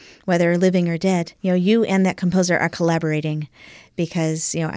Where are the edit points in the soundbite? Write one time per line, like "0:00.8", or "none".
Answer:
0:01.4